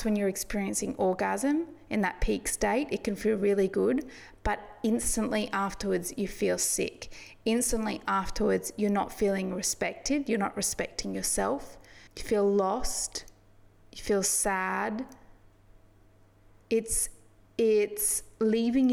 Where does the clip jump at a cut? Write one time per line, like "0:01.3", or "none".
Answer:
0:12.1